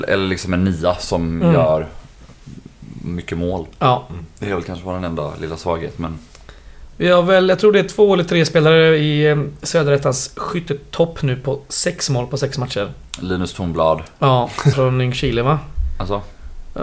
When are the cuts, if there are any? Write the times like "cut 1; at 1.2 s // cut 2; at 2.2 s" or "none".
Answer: cut 1; at 14.7 s